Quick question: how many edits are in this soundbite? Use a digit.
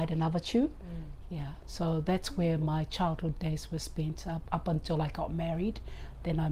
0